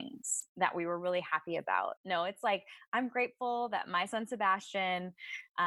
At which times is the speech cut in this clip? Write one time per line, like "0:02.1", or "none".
0:02.0